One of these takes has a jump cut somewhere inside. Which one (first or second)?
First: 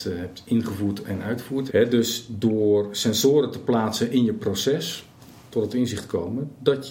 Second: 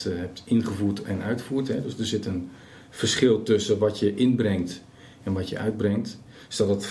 first